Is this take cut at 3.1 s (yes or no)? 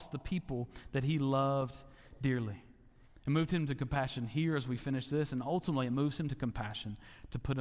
yes